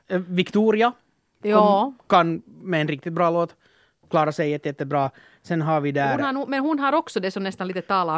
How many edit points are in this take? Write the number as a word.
zero